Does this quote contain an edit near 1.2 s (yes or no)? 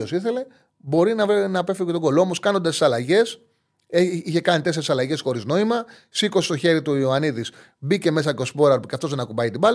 no